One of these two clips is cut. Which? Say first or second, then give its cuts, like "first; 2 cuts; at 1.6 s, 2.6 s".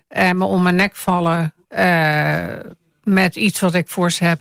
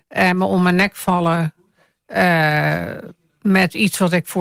first; 1 cut; at 1.6 s